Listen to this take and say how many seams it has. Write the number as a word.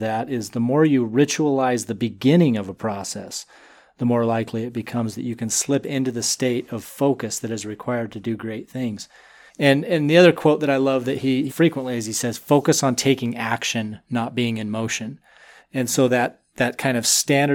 three